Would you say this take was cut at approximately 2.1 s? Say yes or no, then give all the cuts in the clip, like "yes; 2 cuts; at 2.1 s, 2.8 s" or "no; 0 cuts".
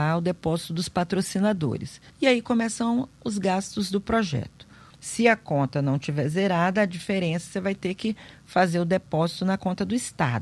yes; 2 cuts; at 2.1 s, 4.9 s